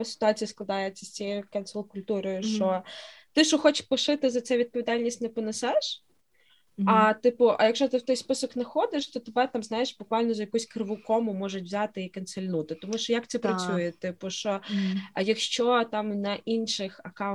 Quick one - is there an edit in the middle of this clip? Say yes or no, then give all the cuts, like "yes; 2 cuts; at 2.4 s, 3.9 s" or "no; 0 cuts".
no; 0 cuts